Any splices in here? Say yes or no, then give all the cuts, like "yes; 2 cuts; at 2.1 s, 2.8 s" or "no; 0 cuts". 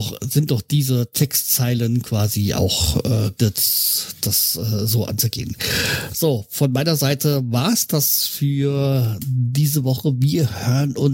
yes; 1 cut; at 3.4 s